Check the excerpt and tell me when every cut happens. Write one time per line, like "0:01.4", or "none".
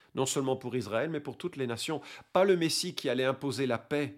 none